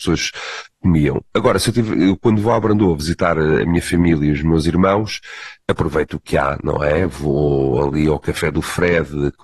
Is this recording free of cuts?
no; 1 cut; at 5.6 s

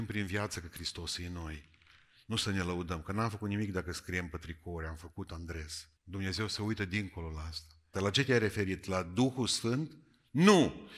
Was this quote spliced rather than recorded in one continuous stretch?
yes; 2 cuts; at 6.0 s, 7.9 s

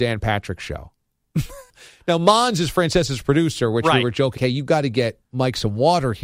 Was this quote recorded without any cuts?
no; 2 cuts; at 1.7 s, 4.4 s

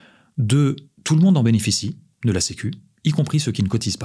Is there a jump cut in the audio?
no; 0 cuts

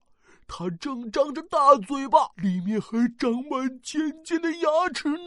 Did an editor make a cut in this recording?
yes; 1 cut; at 2.3 s

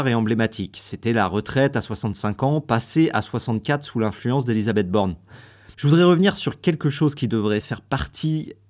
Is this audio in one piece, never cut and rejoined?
no; 2 cuts; at 5.7 s, 7.6 s

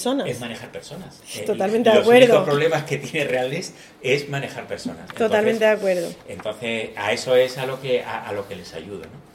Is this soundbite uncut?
yes; 0 cuts

